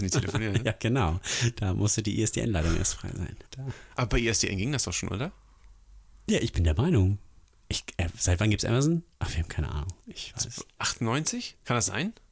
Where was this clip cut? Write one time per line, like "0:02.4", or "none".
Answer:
0:03.5